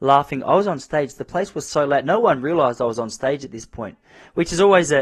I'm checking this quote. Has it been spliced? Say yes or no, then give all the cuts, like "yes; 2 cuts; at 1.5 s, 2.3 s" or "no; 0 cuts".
no; 0 cuts